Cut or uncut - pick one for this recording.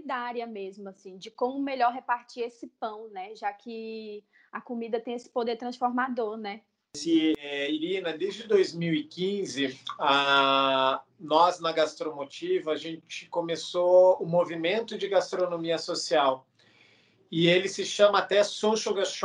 uncut